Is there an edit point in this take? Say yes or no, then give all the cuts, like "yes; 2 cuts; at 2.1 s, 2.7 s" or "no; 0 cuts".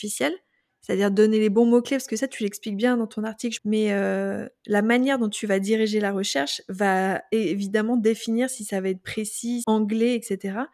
yes; 2 cuts; at 3.6 s, 9.6 s